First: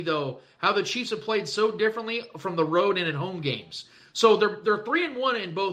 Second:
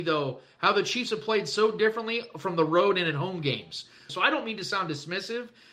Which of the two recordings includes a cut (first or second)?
second